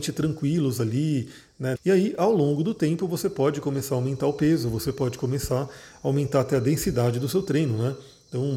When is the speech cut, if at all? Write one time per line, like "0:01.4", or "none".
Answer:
0:01.8